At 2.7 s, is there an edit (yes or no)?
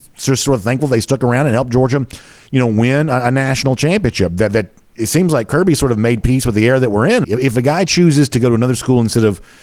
no